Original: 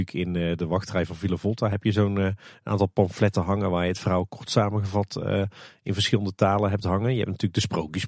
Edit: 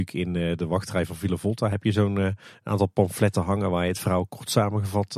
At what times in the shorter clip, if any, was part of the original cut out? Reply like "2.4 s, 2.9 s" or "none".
none